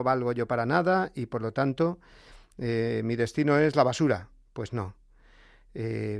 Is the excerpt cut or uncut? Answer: uncut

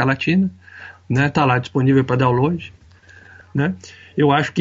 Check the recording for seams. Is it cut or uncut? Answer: cut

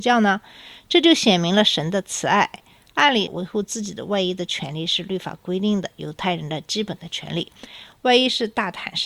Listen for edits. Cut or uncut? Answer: cut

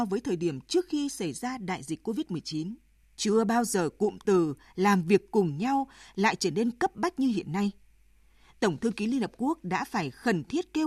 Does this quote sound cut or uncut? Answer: cut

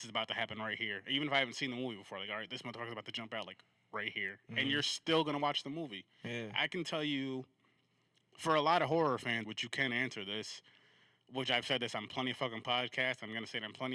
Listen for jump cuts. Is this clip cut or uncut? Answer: cut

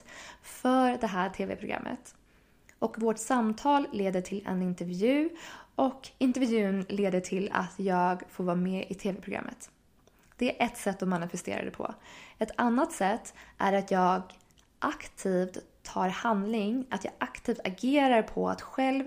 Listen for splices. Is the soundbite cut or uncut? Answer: cut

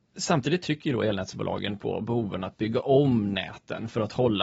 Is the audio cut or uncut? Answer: uncut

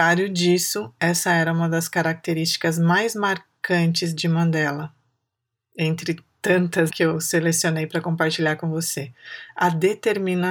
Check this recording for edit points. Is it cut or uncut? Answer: cut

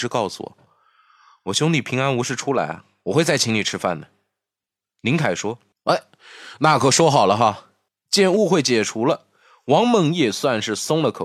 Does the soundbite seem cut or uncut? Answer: uncut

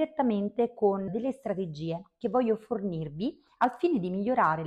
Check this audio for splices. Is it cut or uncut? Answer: cut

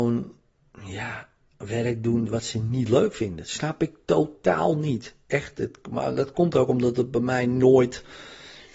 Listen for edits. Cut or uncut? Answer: uncut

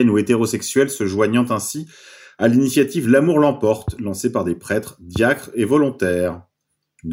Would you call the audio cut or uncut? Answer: uncut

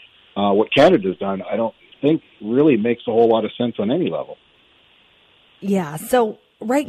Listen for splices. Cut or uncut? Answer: uncut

